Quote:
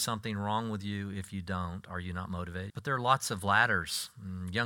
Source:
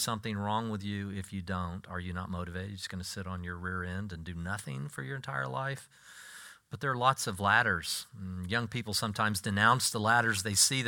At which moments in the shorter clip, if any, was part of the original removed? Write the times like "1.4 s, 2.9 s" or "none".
2.7 s